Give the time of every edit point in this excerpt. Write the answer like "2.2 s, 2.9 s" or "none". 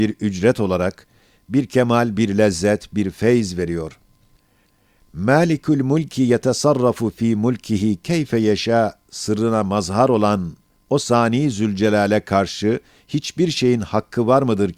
none